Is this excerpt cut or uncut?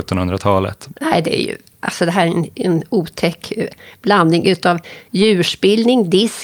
cut